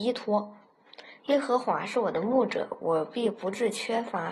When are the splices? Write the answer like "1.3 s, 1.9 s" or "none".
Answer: 1.2 s